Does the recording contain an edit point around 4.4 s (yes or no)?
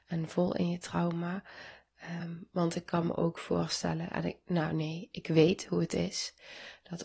no